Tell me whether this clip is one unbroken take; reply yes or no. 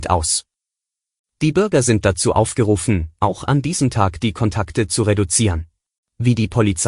no